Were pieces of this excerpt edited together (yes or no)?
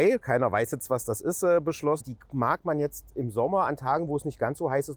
yes